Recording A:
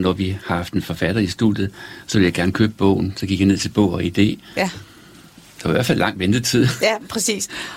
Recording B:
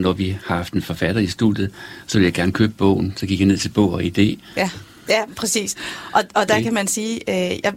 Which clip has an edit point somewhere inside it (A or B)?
B